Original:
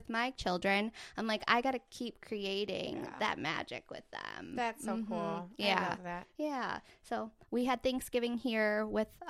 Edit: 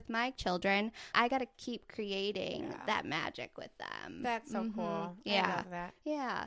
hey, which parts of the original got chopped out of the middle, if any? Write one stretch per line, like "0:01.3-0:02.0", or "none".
0:01.1-0:01.5